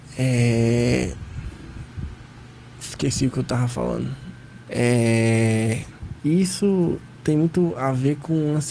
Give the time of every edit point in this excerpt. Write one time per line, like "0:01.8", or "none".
0:04.6
0:06.2